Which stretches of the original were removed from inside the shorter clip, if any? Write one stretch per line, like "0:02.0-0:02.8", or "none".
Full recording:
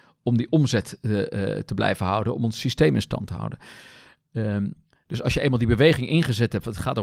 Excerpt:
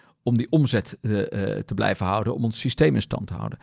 none